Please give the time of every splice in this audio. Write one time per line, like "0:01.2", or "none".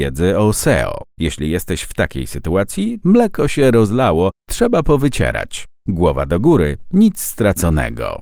0:01.1
0:03.0

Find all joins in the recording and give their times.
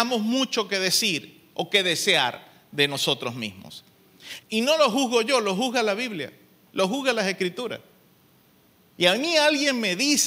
0:04.4

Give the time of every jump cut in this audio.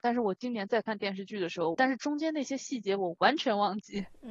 0:01.7

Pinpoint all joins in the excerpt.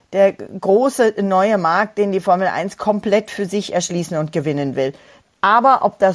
0:05.2

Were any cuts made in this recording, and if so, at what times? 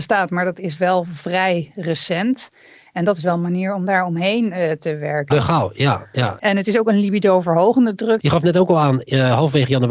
0:05.3
0:06.4
0:08.2

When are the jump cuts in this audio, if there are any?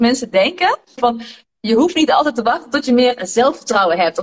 0:01.0

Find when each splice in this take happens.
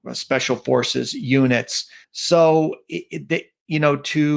0:02.0

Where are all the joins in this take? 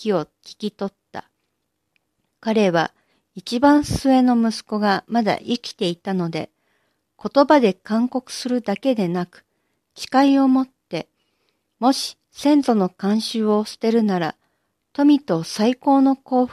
none

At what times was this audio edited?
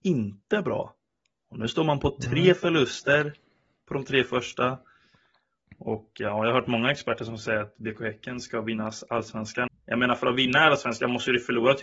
0:09.7

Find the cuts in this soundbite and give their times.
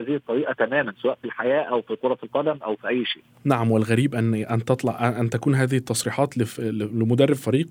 none

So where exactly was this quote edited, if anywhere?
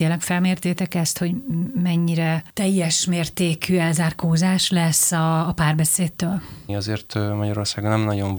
0:06.7

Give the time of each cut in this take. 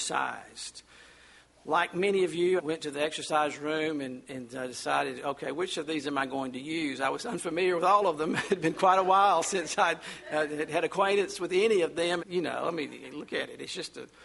0:02.6
0:12.2

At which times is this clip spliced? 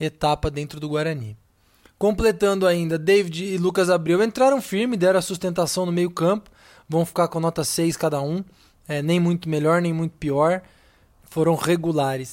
none

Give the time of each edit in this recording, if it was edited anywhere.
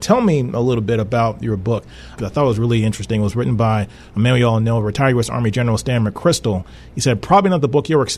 0:02.2

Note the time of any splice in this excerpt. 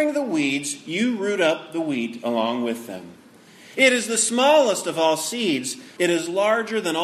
0:03.7
0:06.0

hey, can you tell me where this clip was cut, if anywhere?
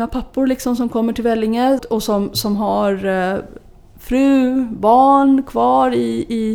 0:01.8

